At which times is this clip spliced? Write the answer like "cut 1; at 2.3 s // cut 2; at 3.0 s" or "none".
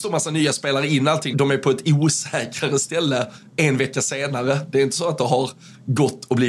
cut 1; at 1.3 s